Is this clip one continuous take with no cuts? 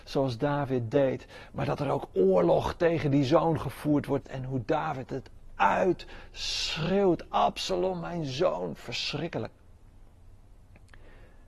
no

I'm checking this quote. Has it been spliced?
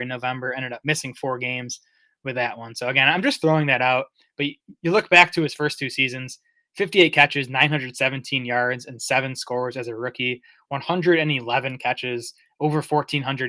no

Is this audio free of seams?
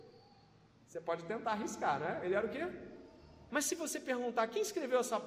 no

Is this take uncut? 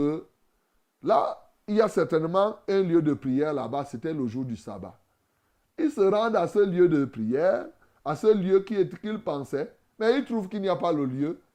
yes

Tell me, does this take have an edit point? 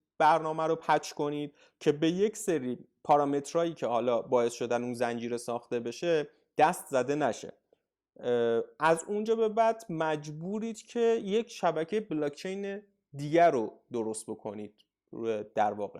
no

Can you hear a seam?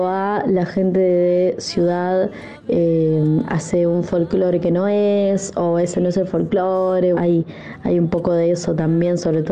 yes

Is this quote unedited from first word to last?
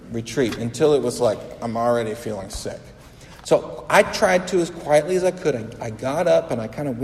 yes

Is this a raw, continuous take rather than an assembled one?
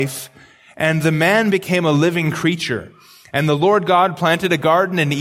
yes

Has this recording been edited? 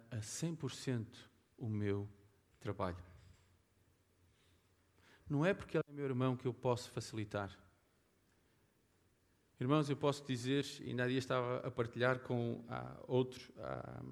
no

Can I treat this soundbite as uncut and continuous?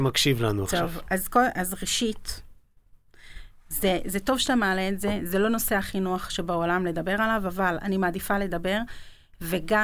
yes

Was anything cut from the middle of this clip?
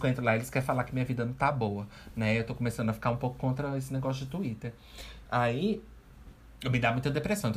yes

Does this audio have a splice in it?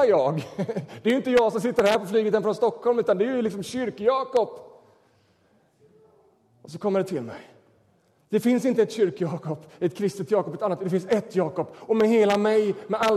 no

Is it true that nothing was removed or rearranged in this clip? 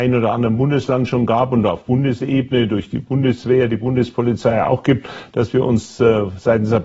yes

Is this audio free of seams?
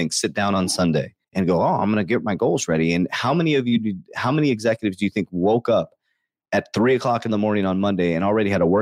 no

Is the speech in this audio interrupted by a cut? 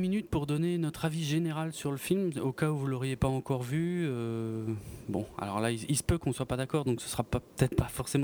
no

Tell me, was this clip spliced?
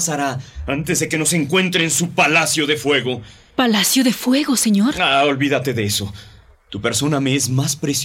no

